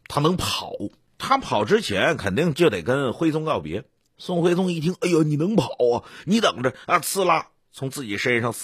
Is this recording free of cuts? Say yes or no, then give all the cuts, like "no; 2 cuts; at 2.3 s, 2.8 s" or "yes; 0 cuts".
yes; 0 cuts